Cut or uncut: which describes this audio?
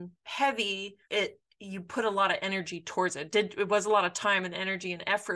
cut